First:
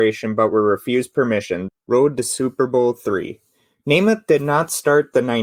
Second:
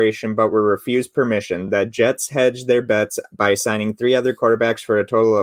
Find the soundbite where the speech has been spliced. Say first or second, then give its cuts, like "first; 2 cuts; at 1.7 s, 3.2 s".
first; 1 cut; at 1.7 s